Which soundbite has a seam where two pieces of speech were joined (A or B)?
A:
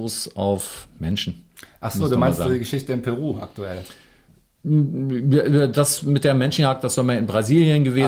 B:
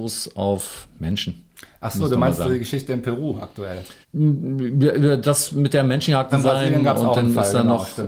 B